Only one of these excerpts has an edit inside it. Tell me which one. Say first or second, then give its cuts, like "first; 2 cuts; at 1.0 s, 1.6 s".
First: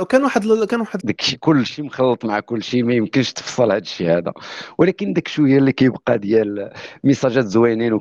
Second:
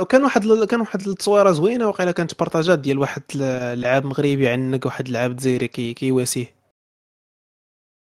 first; 1 cut; at 1.0 s